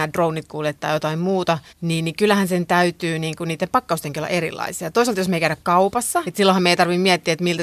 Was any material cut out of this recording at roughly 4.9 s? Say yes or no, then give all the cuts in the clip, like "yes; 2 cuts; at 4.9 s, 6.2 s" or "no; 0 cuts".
no; 2 cuts; at 1.7 s, 6.2 s